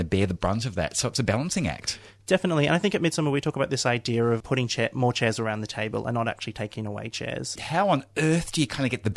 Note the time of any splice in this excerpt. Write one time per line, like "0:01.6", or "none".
0:04.4
0:07.6

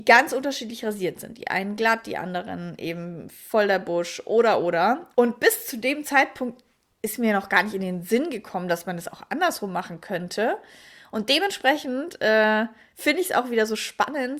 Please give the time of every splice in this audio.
0:05.1

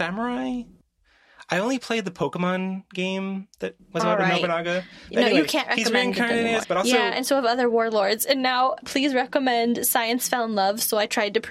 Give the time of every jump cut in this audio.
0:06.6
0:08.8

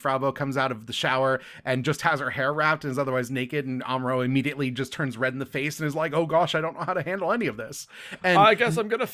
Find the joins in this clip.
none

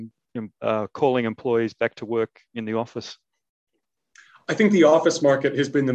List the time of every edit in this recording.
none

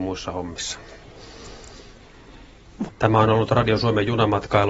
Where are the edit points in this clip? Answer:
0:02.9

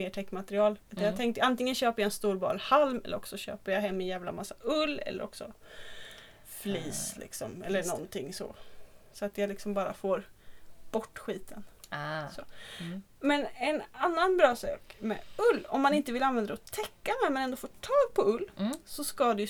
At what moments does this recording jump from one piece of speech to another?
none

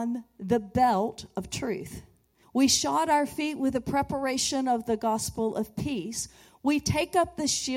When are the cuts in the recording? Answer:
0:02.4

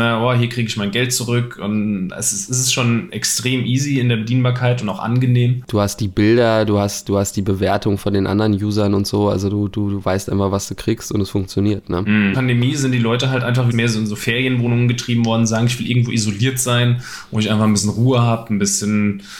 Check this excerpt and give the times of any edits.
0:12.3
0:13.7

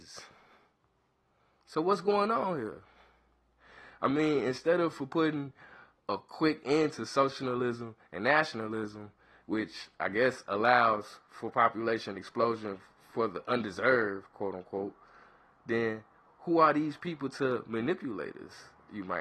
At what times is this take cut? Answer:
none

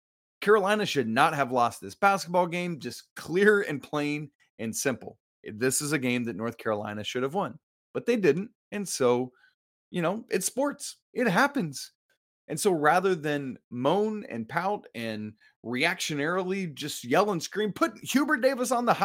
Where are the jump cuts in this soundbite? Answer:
none

